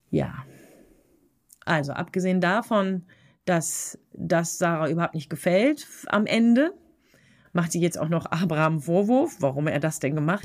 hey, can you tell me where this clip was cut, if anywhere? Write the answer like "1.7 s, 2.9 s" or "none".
none

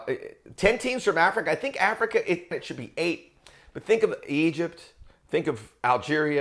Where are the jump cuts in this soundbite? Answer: 2.5 s

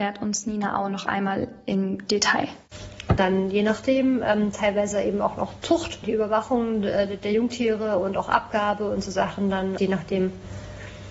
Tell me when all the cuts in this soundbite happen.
3.2 s, 6.0 s, 9.8 s

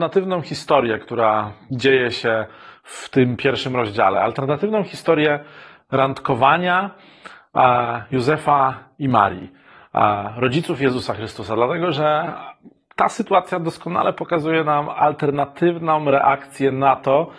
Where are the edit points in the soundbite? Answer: none

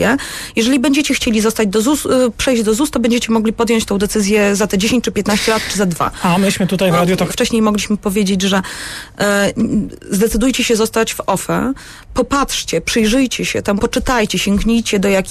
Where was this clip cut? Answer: 7.3 s, 13.8 s

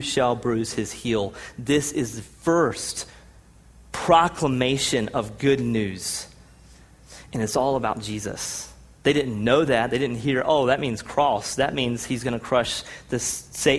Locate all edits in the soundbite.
none

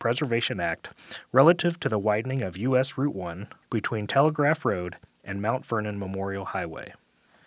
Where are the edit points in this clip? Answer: 3.6 s

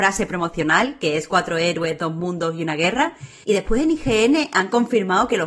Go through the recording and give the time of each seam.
3.4 s

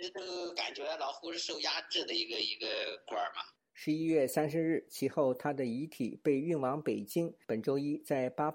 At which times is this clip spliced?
4.9 s

